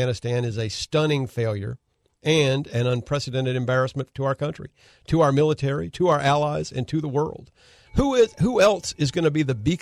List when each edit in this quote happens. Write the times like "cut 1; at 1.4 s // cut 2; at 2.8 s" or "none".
cut 1; at 5.9 s // cut 2; at 7.8 s

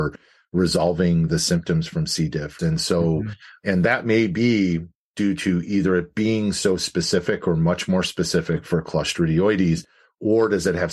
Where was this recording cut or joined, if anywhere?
cut 1; at 2.6 s

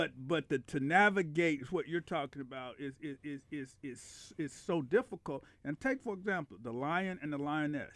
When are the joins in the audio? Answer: none

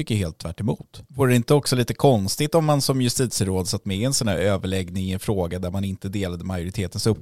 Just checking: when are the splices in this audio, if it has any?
cut 1; at 1.1 s

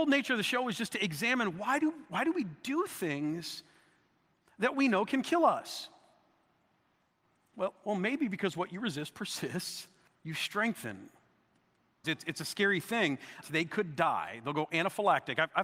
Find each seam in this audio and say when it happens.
cut 1; at 10.1 s // cut 2; at 12.0 s // cut 3; at 13.4 s

